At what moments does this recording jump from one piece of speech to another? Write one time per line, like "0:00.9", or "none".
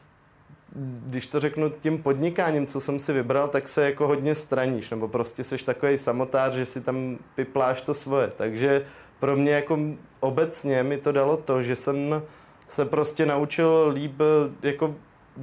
none